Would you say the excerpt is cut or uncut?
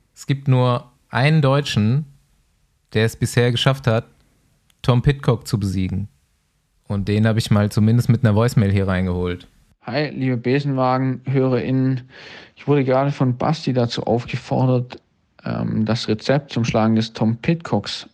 uncut